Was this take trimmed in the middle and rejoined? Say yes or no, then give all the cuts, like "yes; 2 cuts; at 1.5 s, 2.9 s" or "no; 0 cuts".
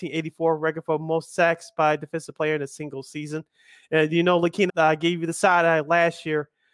yes; 1 cut; at 4.7 s